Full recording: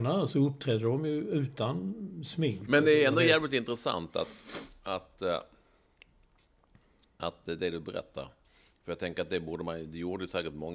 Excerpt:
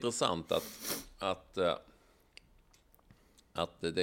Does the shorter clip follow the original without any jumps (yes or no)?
yes